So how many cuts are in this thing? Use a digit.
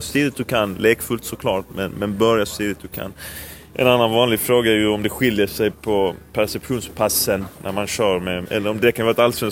2